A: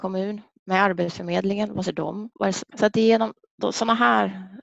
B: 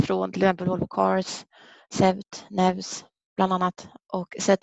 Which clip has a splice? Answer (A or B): A